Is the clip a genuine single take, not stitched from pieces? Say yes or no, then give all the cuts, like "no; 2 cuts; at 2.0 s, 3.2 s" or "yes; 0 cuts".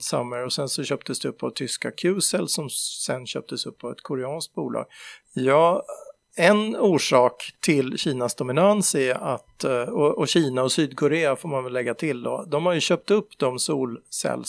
no; 1 cut; at 5.2 s